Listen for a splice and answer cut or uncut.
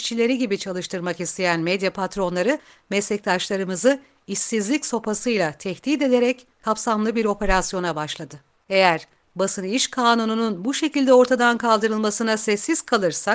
cut